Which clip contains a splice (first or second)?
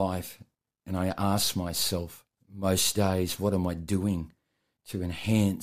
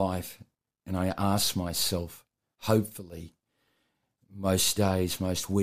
first